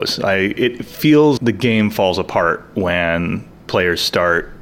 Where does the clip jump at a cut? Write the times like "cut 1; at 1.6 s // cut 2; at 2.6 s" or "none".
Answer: cut 1; at 1.4 s